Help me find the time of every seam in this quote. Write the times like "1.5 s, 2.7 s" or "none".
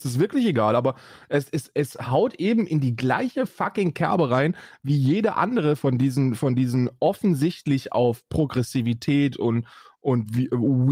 none